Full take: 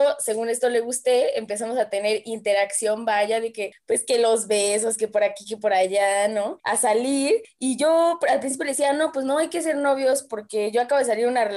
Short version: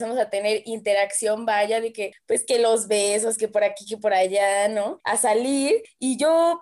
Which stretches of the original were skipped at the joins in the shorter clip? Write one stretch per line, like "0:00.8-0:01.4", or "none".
none